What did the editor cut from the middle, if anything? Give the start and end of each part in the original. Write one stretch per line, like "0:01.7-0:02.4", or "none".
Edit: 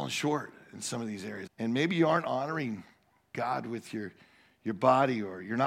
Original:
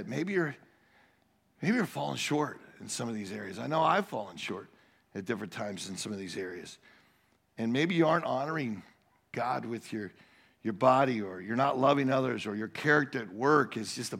0:03.5-0:07.4